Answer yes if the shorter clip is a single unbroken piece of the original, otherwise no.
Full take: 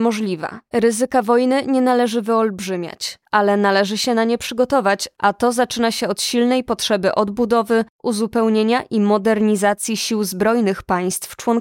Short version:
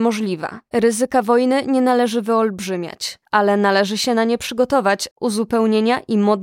no